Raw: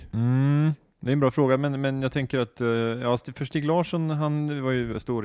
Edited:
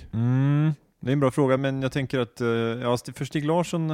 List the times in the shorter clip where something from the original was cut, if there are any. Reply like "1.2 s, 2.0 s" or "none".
1.6 s